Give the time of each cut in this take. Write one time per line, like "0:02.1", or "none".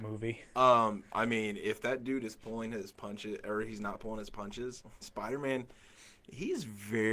0:05.0